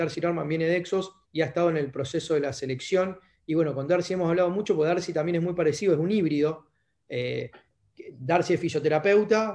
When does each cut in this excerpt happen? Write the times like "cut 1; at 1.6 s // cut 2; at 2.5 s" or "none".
cut 1; at 1.2 s